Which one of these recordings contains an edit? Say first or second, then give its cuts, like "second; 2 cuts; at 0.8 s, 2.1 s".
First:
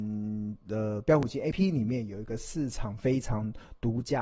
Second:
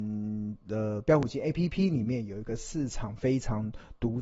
first; 1 cut; at 1.5 s